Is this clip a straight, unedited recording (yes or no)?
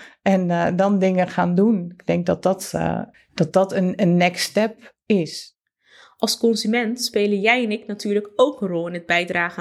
no